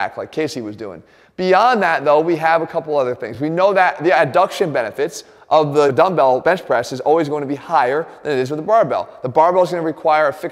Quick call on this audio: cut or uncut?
uncut